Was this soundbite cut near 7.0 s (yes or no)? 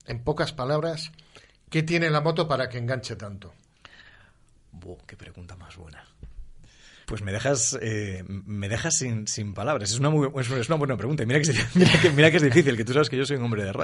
yes